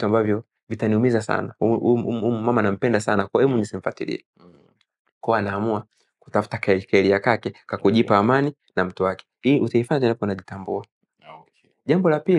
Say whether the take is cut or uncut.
uncut